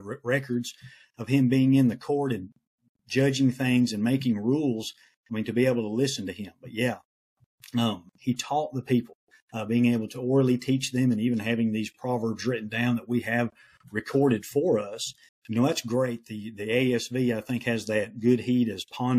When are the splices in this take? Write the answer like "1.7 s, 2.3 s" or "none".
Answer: 15.3 s